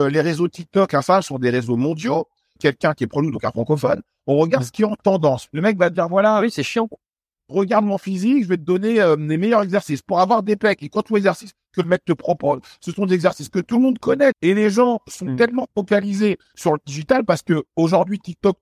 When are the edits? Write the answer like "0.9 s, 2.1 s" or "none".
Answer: 2.6 s, 5.5 s, 14.3 s